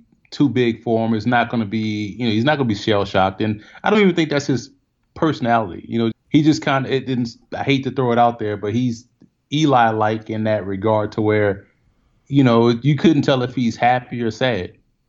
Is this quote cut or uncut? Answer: cut